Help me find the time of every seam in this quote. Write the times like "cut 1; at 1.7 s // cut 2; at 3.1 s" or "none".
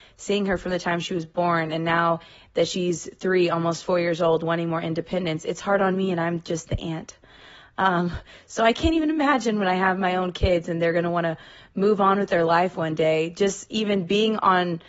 none

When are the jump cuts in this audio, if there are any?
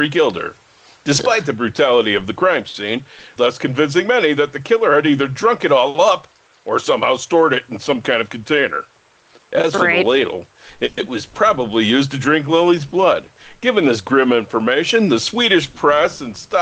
cut 1; at 3.4 s

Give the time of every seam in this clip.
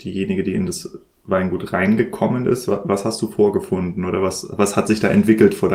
none

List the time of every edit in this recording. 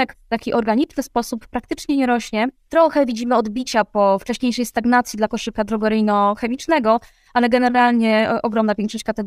none

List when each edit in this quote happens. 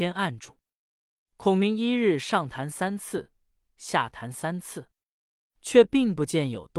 cut 1; at 1.2 s

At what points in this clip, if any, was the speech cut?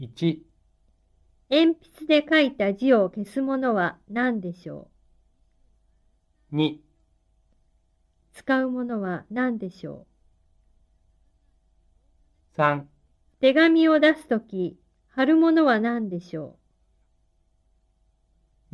cut 1; at 8.2 s // cut 2; at 13.3 s

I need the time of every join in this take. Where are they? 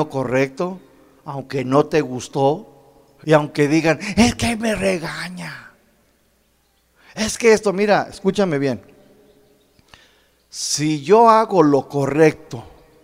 cut 1; at 3.2 s

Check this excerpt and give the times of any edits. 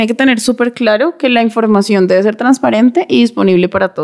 none

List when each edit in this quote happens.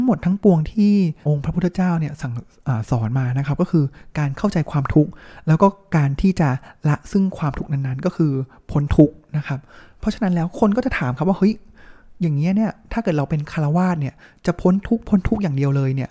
cut 1; at 1.2 s

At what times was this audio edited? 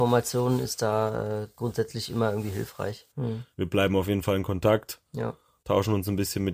cut 1; at 3.1 s

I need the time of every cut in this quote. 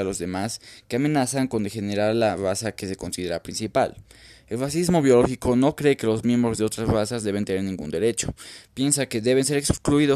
none

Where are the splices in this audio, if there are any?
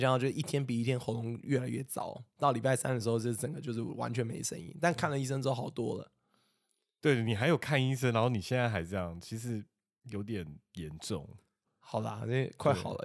none

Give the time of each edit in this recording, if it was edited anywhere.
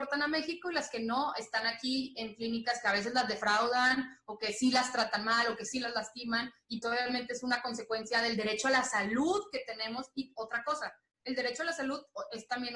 cut 1; at 6.8 s

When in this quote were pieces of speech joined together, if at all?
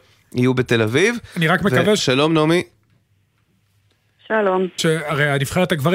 cut 1; at 2.0 s // cut 2; at 4.8 s

